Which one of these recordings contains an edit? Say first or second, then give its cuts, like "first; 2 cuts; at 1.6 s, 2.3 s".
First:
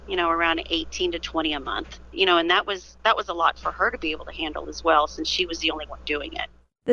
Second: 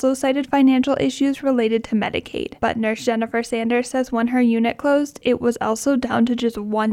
second; 1 cut; at 2.6 s